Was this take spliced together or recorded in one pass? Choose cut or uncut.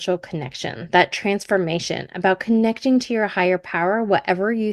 uncut